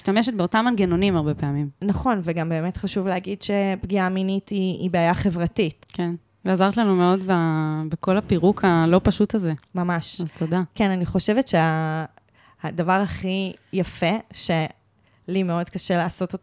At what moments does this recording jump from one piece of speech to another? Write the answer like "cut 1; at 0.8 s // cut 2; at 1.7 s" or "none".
cut 1; at 5.8 s